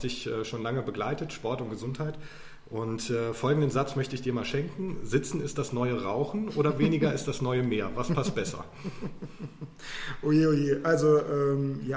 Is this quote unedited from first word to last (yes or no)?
yes